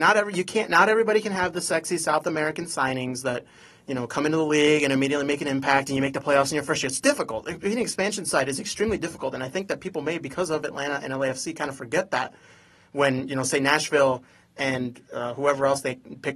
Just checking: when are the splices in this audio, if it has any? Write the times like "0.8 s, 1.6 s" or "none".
none